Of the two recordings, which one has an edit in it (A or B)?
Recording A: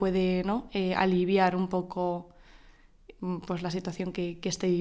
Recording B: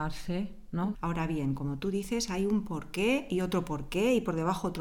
B